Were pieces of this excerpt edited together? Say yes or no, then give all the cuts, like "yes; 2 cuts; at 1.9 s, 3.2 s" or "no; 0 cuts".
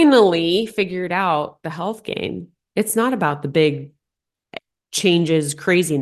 no; 0 cuts